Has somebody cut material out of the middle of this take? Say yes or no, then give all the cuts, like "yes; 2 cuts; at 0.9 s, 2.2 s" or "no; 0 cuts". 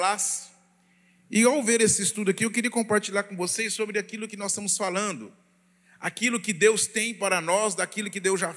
no; 0 cuts